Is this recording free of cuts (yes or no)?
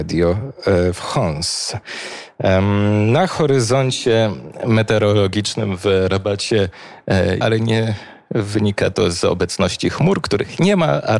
no